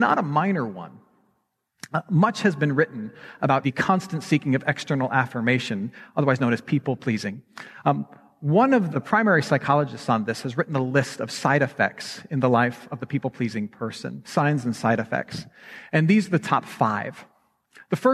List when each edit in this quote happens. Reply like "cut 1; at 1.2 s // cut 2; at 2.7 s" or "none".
cut 1; at 3.6 s // cut 2; at 8.9 s